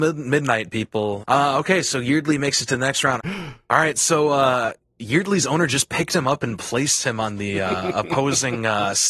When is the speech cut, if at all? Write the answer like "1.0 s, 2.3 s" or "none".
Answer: 1.2 s, 3.2 s